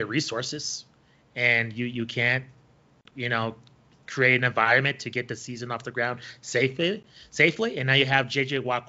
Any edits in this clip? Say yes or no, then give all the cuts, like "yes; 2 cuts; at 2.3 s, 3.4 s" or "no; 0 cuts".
no; 0 cuts